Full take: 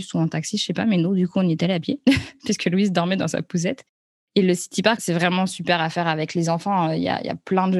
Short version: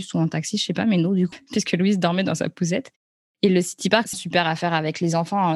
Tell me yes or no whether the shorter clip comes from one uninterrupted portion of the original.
no